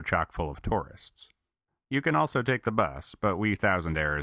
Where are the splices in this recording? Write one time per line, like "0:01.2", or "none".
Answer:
0:01.7